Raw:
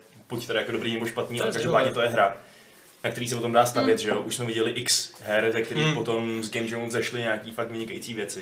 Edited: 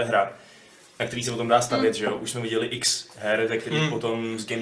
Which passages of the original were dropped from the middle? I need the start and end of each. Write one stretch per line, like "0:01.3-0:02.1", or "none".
none